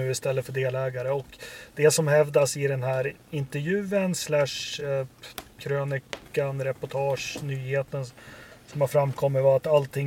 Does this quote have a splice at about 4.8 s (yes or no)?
no